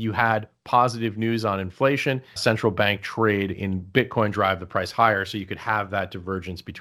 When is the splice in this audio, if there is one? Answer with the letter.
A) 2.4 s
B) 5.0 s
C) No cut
A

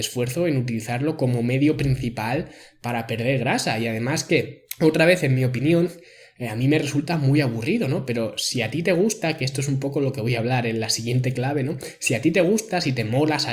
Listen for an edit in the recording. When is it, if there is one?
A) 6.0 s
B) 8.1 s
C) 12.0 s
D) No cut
D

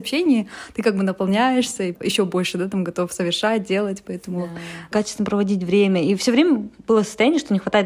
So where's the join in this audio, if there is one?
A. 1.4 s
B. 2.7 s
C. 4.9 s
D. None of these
C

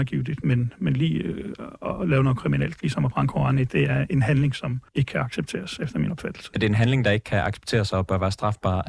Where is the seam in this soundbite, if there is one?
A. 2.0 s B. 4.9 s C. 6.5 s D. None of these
B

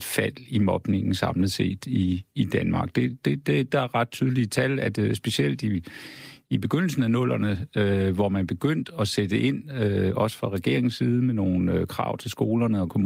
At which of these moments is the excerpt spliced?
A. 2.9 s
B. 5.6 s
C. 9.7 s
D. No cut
D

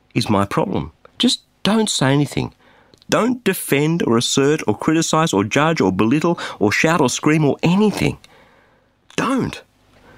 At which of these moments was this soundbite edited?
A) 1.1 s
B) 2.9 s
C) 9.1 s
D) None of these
A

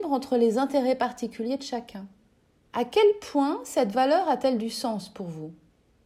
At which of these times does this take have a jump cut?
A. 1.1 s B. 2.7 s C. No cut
B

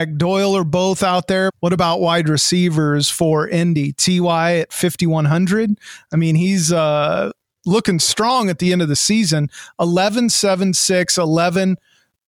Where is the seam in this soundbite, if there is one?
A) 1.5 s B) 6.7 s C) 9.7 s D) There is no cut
A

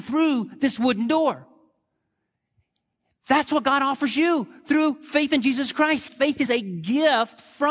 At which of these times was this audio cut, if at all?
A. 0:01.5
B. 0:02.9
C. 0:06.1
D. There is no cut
C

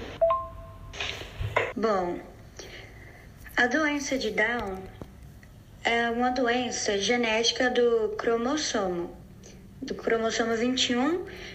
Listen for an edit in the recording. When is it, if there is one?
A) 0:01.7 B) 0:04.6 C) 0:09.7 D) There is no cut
A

